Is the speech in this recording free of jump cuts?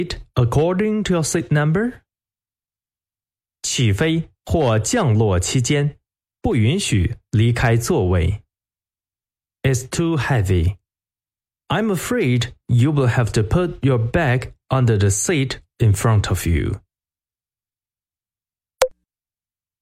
no; 1 cut; at 9.6 s

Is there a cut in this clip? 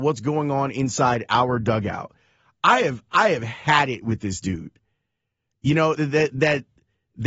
no; 0 cuts

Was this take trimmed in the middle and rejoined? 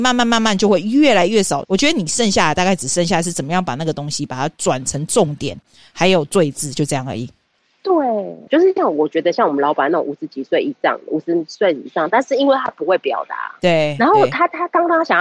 yes; 3 cuts; at 1.6 s, 8.5 s, 12.1 s

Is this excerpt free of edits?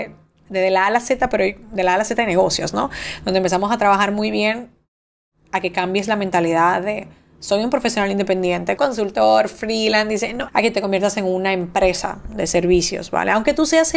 no; 2 cuts; at 8.8 s, 10.5 s

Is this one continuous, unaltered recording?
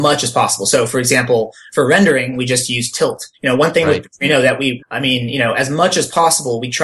no; 2 cuts; at 3.3 s, 4.8 s

